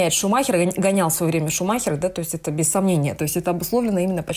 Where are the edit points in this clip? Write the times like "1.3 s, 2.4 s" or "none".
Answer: 3.2 s